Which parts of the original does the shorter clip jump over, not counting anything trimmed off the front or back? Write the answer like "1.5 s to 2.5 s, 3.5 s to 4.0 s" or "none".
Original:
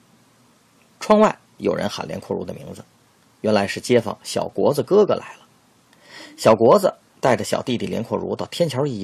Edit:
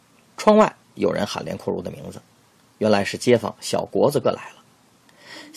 4.9 s to 5.1 s